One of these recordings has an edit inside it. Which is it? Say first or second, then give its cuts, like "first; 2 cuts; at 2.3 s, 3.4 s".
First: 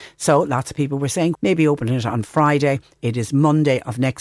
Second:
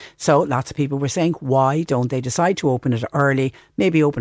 first; 2 cuts; at 1.3 s, 3.0 s